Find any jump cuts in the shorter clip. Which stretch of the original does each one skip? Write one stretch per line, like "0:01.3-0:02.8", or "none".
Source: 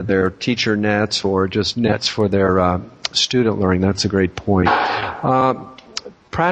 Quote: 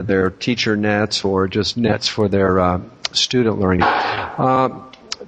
0:03.8-0:04.6